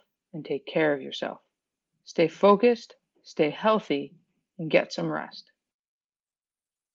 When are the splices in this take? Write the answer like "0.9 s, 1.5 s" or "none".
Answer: none